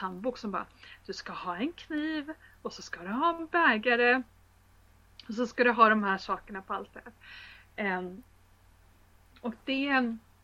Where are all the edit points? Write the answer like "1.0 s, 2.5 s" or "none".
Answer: none